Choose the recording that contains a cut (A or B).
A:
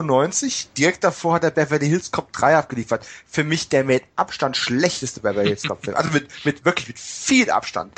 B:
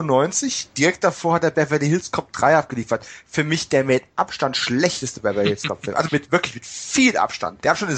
B